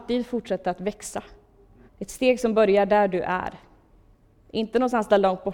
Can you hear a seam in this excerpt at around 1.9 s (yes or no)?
yes